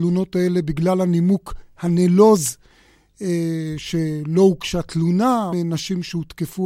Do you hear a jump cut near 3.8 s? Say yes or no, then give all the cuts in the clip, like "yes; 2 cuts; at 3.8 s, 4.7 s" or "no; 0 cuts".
no; 1 cut; at 5.5 s